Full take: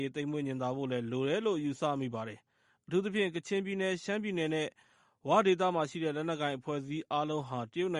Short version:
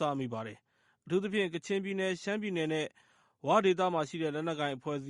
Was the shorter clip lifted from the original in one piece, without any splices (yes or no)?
yes